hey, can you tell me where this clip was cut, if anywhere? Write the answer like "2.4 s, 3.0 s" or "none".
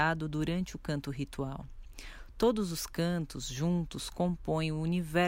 none